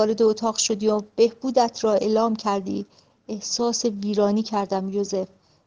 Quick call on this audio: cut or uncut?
uncut